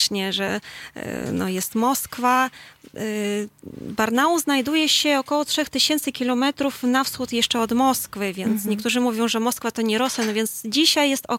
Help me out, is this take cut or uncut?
uncut